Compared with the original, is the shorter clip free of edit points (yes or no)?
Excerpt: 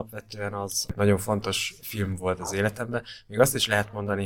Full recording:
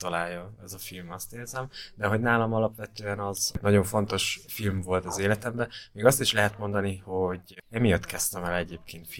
yes